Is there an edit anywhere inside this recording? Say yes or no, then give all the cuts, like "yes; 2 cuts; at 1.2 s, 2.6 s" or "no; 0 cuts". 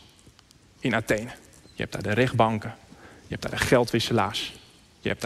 yes; 1 cut; at 1.6 s